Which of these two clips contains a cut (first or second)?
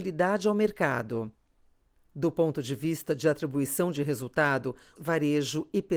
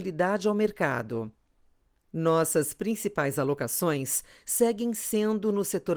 first